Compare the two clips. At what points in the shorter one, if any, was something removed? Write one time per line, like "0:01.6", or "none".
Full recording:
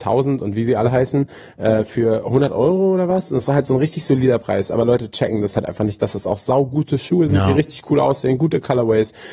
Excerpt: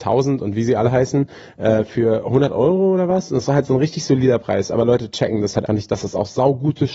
0:05.7